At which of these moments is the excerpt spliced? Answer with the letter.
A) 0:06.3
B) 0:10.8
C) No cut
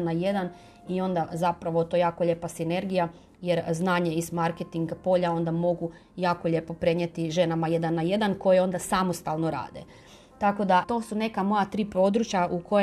B